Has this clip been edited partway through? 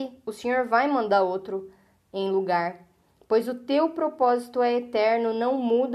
no; 0 cuts

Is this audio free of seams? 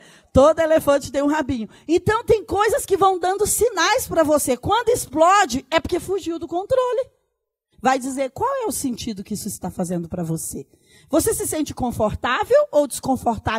no; 1 cut; at 7.7 s

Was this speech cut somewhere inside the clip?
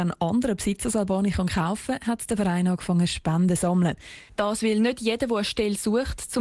yes; 1 cut; at 4.3 s

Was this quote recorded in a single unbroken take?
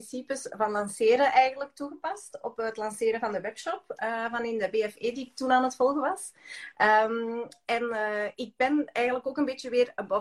yes; 0 cuts

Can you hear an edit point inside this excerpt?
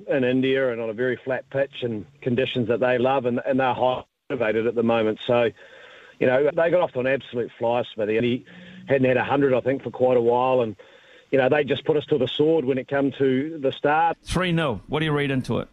yes; 3 cuts; at 6.5 s, 8.2 s, 14.1 s

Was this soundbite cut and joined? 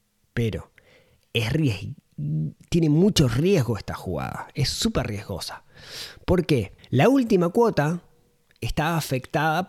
yes; 1 cut; at 6.8 s

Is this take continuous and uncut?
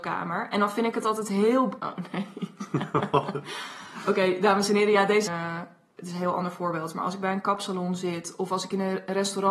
no; 2 cuts; at 1.8 s, 5.3 s

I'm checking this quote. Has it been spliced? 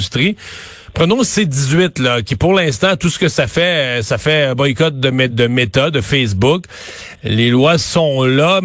yes; 2 cuts; at 5.3 s, 7.2 s

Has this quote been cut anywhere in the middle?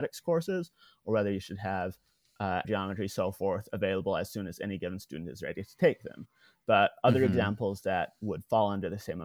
yes; 1 cut; at 2.6 s

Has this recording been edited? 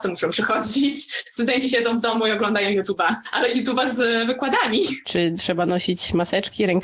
no; 0 cuts

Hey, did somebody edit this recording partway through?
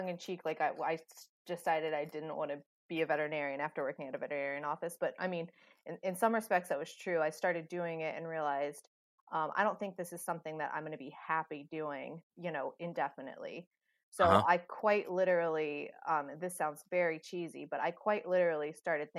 yes; 1 cut; at 12.3 s

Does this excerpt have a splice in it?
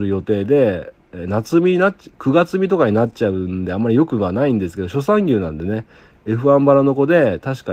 no; 0 cuts

